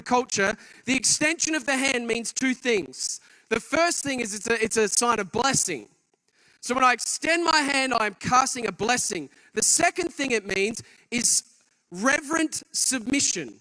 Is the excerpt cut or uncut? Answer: uncut